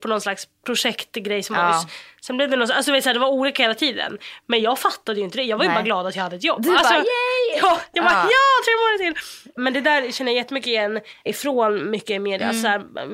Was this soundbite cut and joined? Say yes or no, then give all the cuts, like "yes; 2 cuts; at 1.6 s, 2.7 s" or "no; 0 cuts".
no; 0 cuts